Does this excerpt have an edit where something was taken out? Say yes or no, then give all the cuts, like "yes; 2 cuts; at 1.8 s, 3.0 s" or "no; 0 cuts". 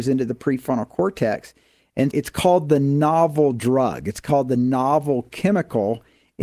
yes; 1 cut; at 2.1 s